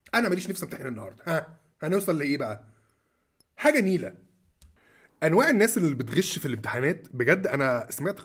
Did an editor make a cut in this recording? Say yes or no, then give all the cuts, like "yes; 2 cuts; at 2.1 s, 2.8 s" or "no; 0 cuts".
no; 0 cuts